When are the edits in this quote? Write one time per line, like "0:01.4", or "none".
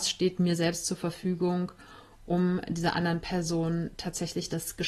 none